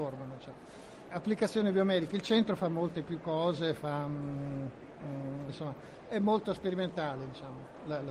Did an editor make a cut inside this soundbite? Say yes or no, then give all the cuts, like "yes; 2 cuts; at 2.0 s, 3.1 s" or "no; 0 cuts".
yes; 2 cuts; at 1.1 s, 5.5 s